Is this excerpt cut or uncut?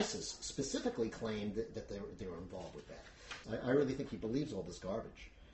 cut